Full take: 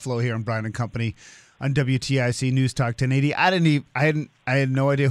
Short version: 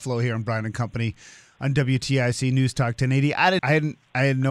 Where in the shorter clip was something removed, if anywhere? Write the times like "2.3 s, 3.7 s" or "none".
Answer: 3.6 s